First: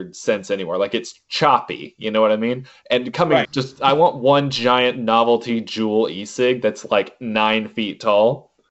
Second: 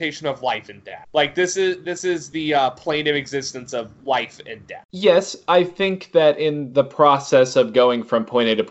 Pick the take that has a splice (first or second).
first